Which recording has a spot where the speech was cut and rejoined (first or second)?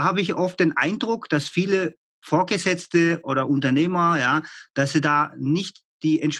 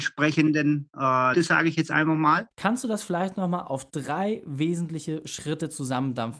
second